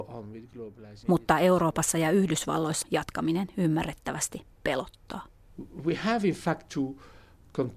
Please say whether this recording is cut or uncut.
cut